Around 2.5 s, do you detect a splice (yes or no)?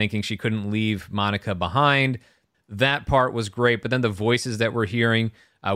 yes